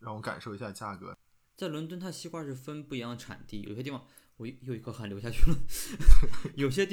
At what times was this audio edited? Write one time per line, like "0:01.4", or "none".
0:01.4
0:03.6